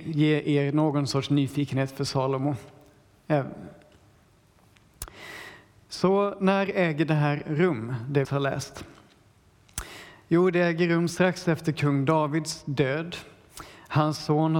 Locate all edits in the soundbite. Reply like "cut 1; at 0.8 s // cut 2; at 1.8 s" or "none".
cut 1; at 8.2 s

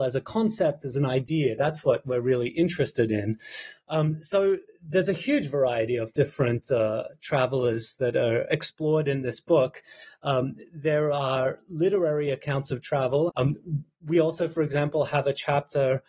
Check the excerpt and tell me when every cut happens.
cut 1; at 13.3 s

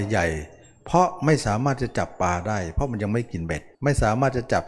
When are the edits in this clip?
cut 1; at 3.7 s

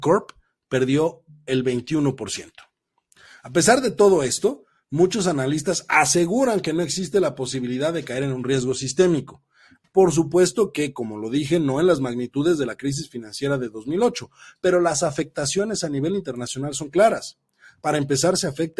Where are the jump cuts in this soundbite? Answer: cut 1; at 9.8 s

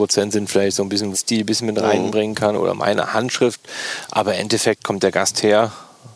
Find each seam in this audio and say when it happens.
cut 1; at 1.1 s

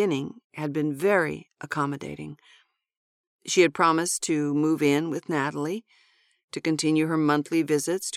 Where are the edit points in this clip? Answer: none

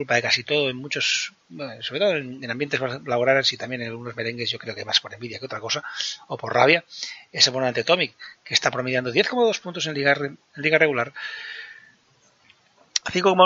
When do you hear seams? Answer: none

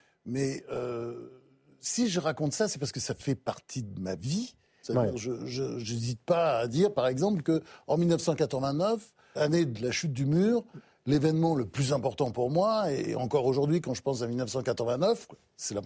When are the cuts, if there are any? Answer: cut 1; at 4.8 s // cut 2; at 9.4 s

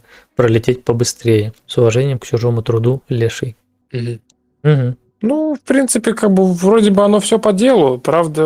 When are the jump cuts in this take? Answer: cut 1; at 1.6 s

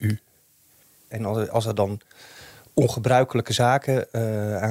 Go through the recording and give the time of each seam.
cut 1; at 1.1 s

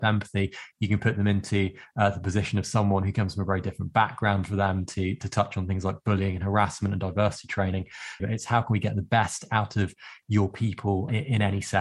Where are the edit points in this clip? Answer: cut 1; at 8.2 s

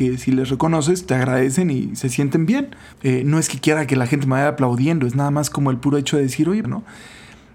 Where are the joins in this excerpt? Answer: cut 1; at 2.9 s // cut 2; at 6.6 s

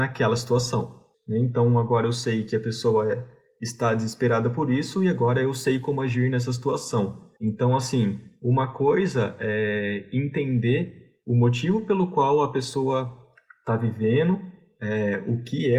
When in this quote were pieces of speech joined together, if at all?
cut 1; at 1.1 s // cut 2; at 7.4 s

